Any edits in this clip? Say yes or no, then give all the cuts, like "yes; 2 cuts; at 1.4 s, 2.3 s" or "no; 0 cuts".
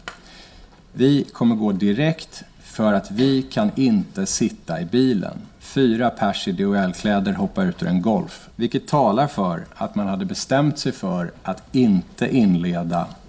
yes; 1 cut; at 8.5 s